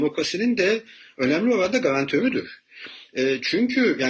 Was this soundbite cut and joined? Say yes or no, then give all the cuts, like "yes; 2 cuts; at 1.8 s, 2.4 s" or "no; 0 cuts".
no; 0 cuts